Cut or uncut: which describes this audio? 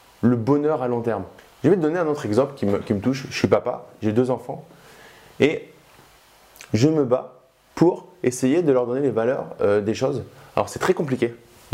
uncut